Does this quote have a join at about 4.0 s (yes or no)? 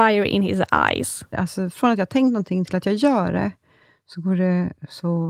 no